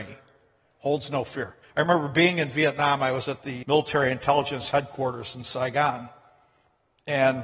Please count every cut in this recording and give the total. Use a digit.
2